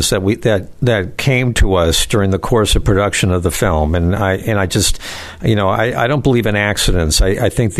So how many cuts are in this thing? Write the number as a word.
zero